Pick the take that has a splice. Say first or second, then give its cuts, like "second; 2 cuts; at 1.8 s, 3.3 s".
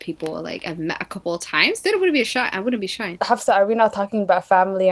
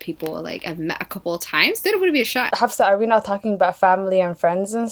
second; 1 cut; at 2.5 s